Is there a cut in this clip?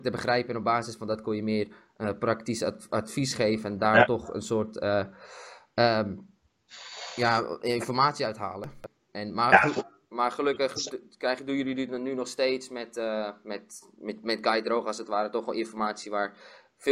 no; 0 cuts

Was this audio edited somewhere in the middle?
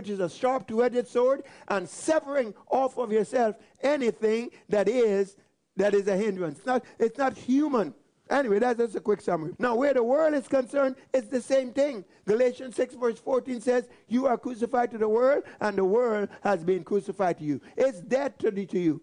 yes; 3 cuts; at 6.6 s, 8.2 s, 9.5 s

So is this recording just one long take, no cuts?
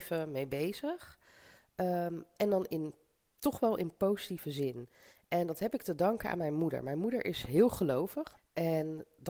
no; 1 cut; at 8.4 s

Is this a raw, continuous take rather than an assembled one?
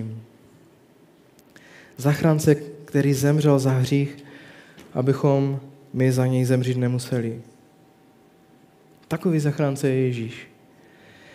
yes; 0 cuts

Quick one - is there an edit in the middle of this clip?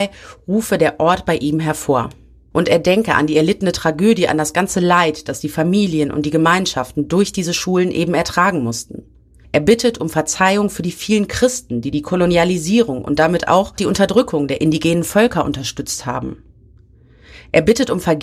no; 0 cuts

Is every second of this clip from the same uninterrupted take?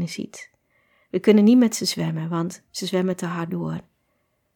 yes; 0 cuts

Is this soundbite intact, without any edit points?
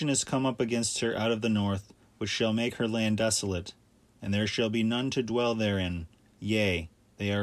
no; 1 cut; at 6.3 s

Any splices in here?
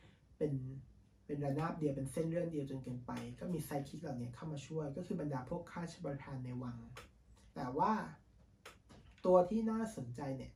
yes; 1 cut; at 7.5 s

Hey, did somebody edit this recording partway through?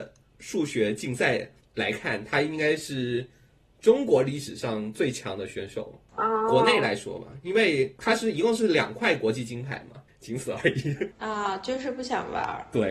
yes; 2 cuts; at 6.1 s, 10.1 s

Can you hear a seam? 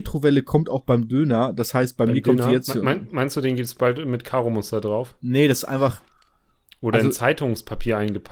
no; 0 cuts

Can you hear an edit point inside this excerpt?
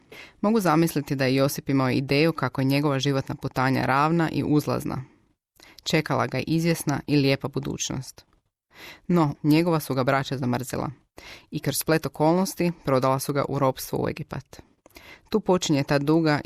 yes; 1 cut; at 9.3 s

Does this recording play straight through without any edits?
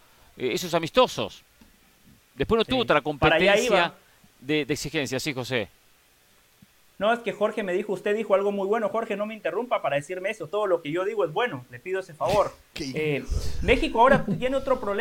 yes; 0 cuts

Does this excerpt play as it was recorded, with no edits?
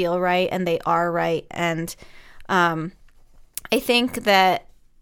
yes; 0 cuts

